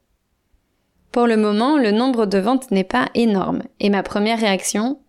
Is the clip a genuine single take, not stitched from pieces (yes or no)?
no